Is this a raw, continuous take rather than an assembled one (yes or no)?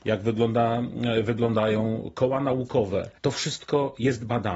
no